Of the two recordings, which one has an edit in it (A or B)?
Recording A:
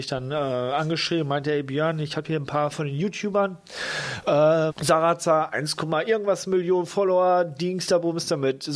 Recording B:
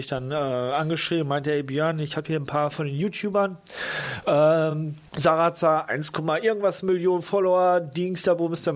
A